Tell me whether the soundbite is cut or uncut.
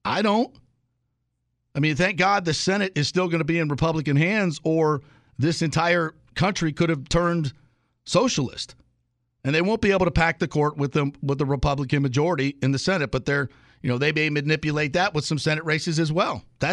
uncut